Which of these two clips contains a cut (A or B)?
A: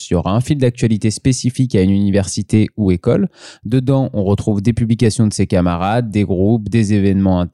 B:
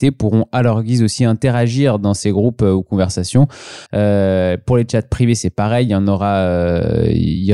B